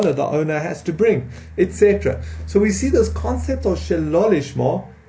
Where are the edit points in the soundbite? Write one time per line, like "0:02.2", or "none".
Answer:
none